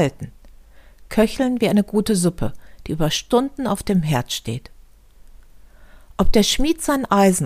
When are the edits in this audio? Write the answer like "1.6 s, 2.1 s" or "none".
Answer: none